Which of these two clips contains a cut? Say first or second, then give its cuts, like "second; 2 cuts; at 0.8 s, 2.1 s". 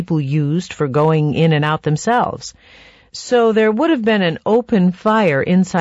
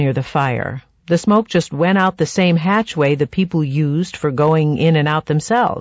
second; 1 cut; at 1.0 s